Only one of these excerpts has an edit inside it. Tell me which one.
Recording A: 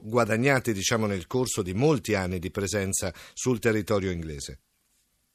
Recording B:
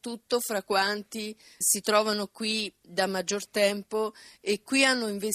B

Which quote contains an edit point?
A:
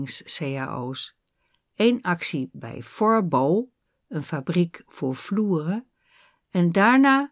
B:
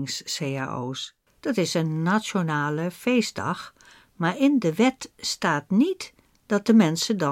B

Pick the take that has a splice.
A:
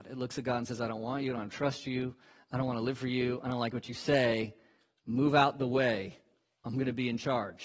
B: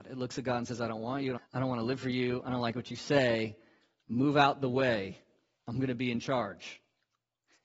B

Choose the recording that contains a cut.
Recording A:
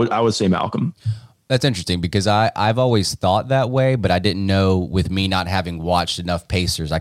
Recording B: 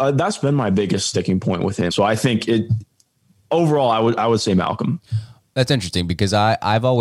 B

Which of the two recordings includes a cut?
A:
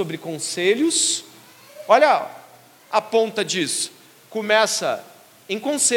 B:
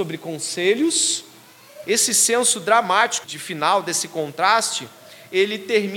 B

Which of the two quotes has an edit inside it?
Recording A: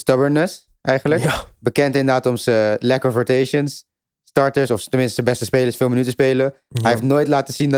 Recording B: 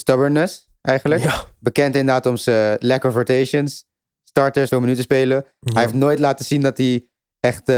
B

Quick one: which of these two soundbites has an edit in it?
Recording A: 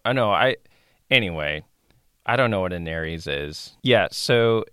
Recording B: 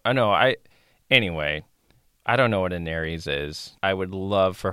B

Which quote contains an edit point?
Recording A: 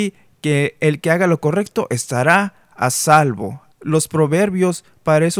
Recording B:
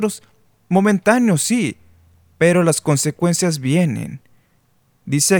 A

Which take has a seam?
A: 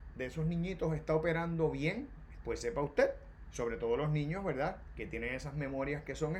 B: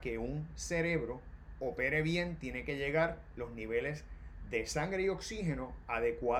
A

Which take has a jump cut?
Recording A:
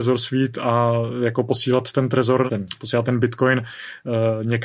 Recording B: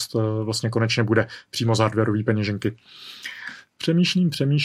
A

